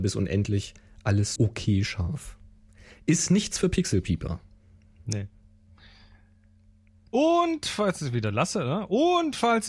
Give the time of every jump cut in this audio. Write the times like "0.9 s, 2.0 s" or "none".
1.4 s